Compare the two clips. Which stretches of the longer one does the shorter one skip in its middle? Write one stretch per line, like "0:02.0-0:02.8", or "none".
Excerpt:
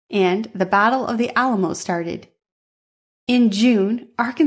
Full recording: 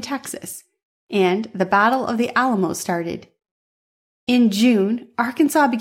none